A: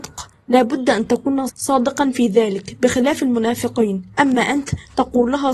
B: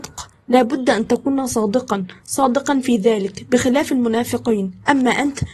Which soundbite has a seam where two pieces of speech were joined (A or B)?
A